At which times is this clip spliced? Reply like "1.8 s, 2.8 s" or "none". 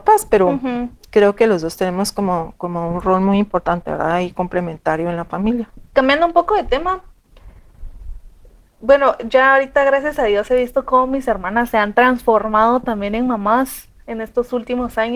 5.9 s